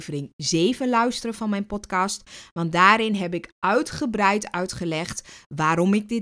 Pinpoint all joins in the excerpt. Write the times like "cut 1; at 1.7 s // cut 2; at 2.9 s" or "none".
none